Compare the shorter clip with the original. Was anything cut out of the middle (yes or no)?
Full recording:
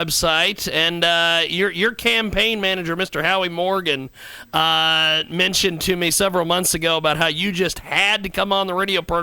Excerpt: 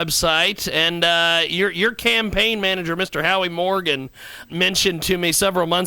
yes